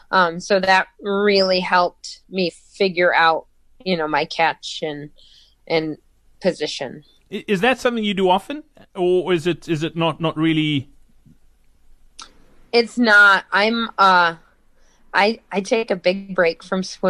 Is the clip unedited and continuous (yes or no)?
yes